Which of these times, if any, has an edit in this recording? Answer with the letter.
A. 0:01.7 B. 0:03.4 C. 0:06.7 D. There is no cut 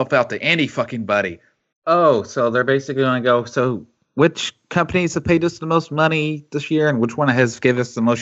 A